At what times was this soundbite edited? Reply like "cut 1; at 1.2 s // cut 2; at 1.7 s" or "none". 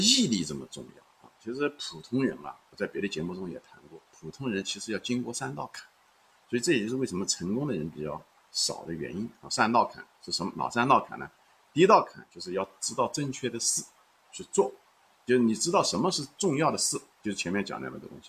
none